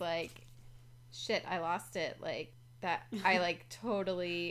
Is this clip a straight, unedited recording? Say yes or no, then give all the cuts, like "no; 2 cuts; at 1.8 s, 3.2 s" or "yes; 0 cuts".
yes; 0 cuts